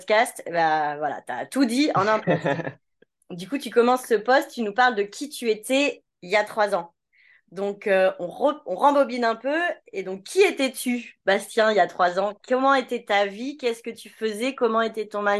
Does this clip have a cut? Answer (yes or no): no